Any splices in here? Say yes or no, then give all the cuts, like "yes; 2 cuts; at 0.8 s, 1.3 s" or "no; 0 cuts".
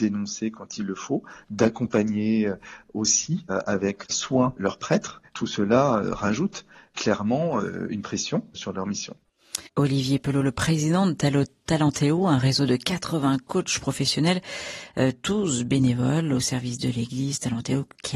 yes; 2 cuts; at 4.0 s, 9.7 s